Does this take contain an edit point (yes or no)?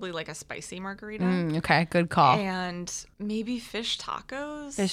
no